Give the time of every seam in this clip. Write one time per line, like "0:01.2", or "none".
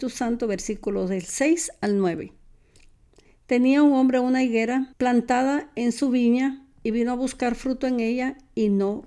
0:03.3
0:04.9